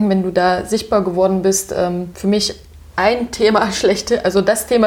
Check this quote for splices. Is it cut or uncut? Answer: uncut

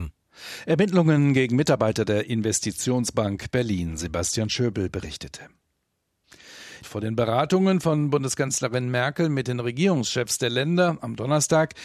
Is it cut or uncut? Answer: cut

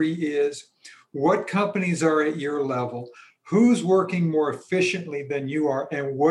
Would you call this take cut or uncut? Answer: uncut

